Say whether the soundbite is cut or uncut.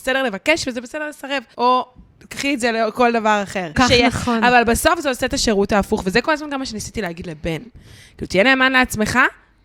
cut